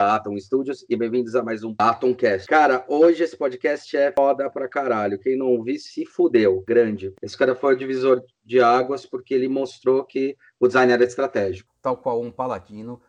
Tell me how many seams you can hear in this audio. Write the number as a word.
two